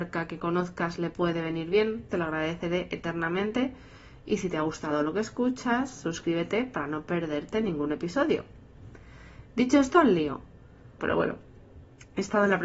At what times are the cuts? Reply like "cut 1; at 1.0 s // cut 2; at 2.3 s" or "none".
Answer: cut 1; at 2.1 s // cut 2; at 11.0 s